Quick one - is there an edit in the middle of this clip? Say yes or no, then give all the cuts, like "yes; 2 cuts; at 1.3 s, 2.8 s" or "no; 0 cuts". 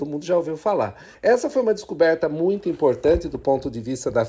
yes; 1 cut; at 1.1 s